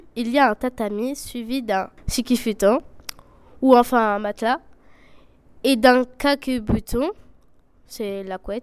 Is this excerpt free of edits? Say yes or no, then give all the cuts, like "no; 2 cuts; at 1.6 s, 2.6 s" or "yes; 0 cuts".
yes; 0 cuts